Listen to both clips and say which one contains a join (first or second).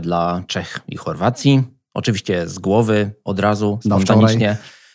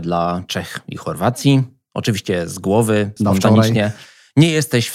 second